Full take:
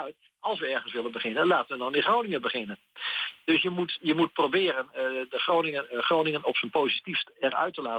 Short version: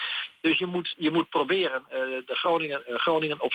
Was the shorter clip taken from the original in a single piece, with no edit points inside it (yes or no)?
yes